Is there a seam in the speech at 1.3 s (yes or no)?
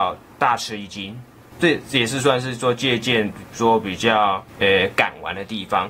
no